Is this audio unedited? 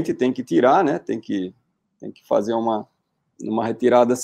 yes; 0 cuts

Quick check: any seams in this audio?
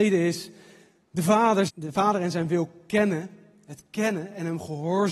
yes; 1 cut; at 1.7 s

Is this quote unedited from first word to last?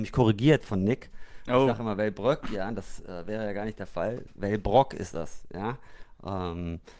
yes; 0 cuts

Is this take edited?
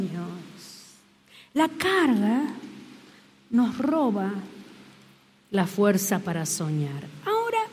no; 0 cuts

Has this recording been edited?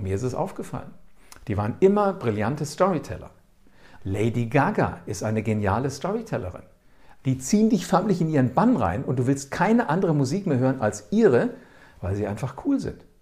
yes; 2 cuts; at 4.0 s, 7.2 s

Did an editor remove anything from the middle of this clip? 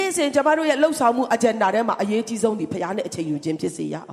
no; 0 cuts

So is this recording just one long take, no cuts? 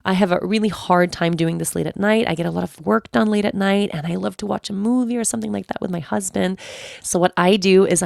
yes; 0 cuts

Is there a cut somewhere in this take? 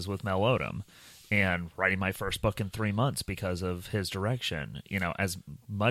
no; 0 cuts

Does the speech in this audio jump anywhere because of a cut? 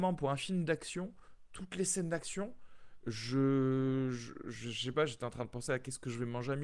no; 0 cuts

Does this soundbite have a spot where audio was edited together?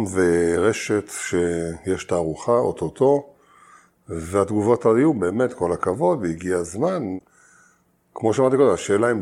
no; 0 cuts

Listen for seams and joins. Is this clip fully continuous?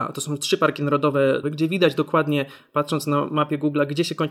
no; 1 cut; at 1.4 s

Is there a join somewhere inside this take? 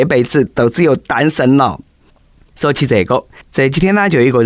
no; 0 cuts

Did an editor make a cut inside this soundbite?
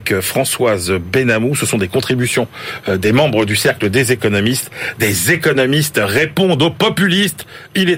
no; 0 cuts

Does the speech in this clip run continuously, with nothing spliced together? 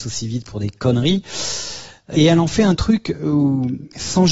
no; 1 cut; at 2.1 s

